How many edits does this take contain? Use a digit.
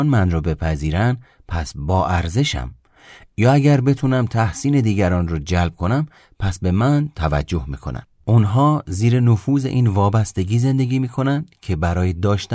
1